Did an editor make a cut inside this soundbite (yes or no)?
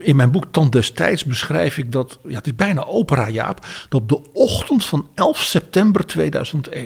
yes